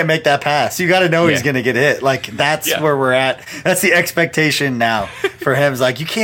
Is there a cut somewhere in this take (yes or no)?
no